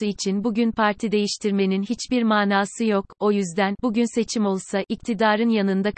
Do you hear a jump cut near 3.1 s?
no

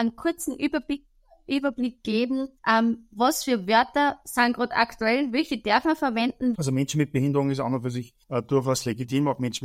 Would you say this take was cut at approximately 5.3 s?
no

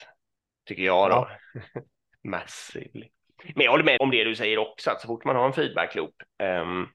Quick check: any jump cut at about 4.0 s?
yes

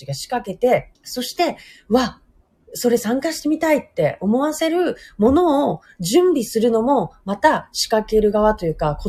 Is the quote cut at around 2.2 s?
no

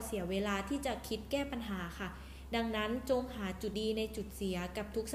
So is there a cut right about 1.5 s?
no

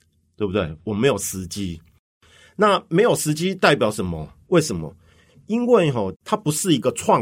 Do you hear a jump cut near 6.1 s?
yes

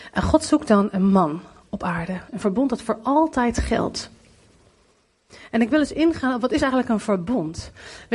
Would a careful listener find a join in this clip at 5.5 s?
no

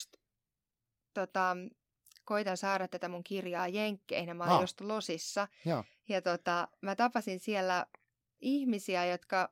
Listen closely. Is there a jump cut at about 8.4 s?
yes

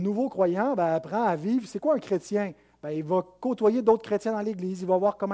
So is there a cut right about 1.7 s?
no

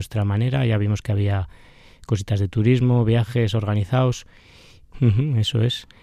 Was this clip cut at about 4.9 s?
yes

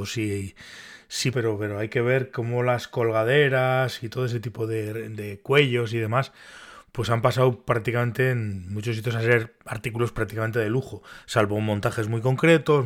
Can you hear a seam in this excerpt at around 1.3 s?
yes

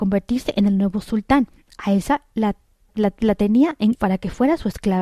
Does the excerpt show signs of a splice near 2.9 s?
yes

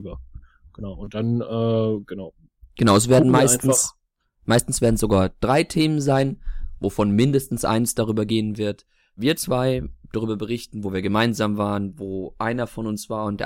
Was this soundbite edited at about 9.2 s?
yes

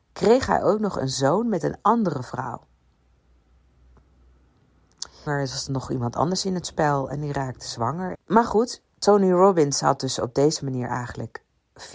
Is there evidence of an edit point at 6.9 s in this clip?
no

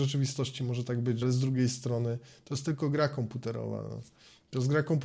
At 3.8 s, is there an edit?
no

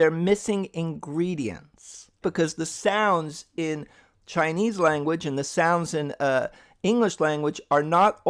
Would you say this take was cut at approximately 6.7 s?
no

